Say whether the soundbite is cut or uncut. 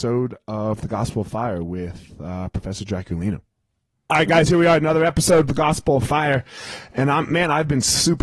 uncut